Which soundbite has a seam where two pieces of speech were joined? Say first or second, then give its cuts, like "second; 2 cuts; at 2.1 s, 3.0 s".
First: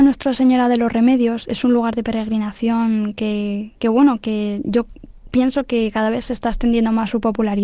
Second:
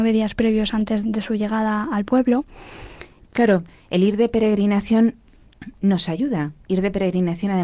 second; 2 cuts; at 1.0 s, 3.2 s